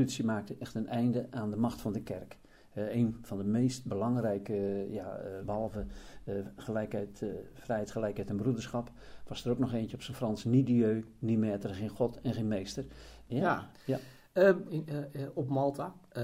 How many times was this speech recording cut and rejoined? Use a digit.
3